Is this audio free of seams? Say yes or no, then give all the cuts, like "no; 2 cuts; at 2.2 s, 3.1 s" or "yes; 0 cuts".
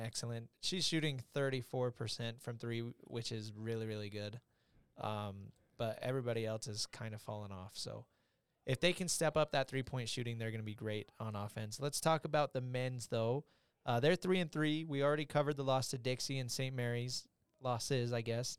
yes; 0 cuts